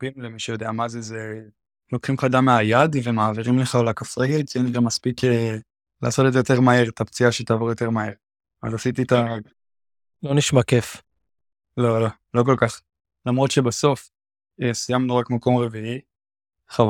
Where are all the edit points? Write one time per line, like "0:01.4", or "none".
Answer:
0:13.1